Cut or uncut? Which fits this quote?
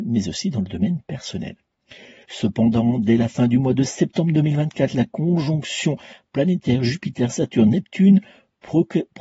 cut